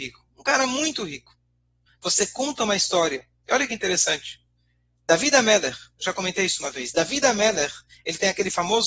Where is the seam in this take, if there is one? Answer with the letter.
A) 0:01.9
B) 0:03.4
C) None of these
A